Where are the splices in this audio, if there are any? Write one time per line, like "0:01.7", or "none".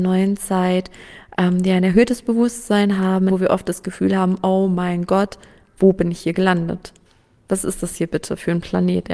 0:03.3